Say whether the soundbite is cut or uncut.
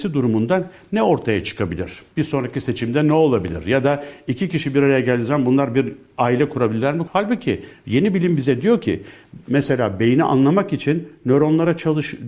cut